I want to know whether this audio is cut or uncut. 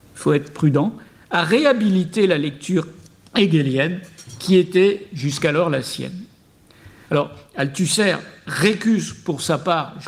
cut